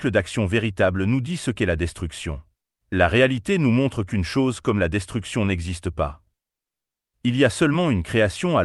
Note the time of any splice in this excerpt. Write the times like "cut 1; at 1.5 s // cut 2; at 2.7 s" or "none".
cut 1; at 2.8 s